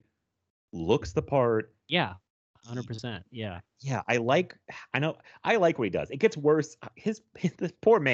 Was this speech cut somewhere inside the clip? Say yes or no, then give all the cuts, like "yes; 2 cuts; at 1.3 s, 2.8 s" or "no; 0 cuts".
no; 0 cuts